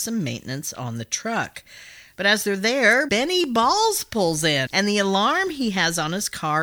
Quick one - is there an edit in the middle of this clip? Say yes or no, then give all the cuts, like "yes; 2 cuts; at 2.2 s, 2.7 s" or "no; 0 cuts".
yes; 2 cuts; at 3.1 s, 4.7 s